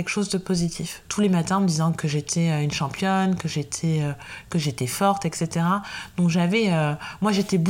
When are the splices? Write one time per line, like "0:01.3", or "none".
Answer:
0:01.0